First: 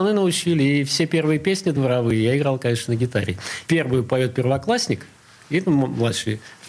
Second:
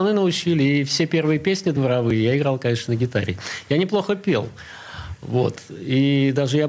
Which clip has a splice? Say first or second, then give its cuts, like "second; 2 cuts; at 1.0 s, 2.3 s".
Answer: first; 1 cut; at 3.6 s